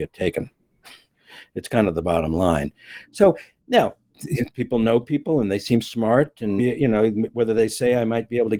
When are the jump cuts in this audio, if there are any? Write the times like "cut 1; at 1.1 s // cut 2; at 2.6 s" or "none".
cut 1; at 4.1 s // cut 2; at 6.6 s